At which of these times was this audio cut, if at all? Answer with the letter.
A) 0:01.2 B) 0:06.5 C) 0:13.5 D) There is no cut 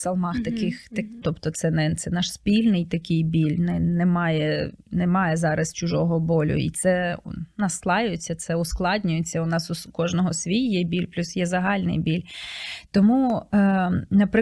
A